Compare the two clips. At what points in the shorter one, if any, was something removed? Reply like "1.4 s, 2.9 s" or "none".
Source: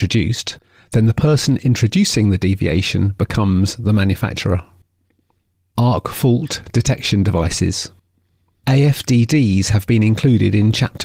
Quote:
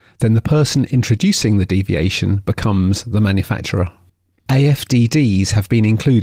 4.4 s